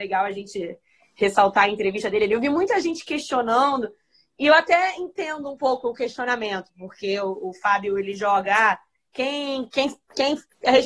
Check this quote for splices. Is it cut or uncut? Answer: uncut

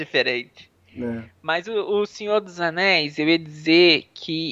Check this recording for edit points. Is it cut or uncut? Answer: uncut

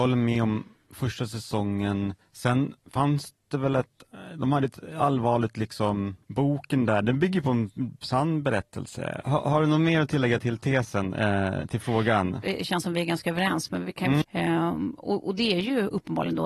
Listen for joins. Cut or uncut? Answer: cut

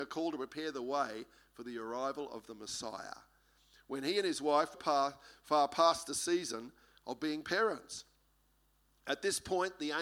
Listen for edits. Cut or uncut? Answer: cut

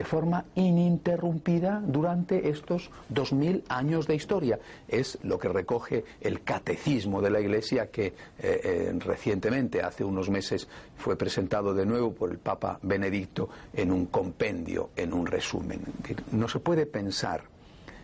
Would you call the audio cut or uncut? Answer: uncut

